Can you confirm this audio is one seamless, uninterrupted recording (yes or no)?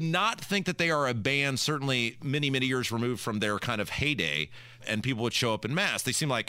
no